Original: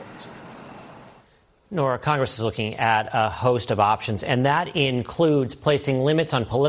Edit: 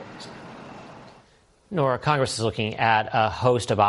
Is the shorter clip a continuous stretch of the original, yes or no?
yes